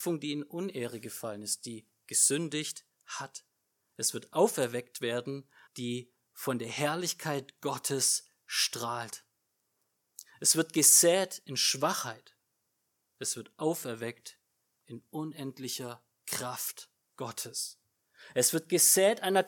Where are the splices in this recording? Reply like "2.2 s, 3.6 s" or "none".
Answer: 5.7 s